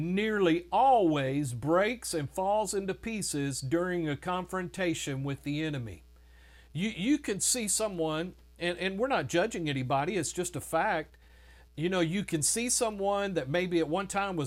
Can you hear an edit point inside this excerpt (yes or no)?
no